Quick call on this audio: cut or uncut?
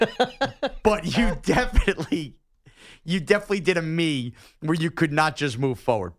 uncut